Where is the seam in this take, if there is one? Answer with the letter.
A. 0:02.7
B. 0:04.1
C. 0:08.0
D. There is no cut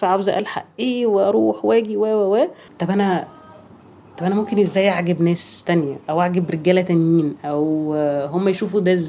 A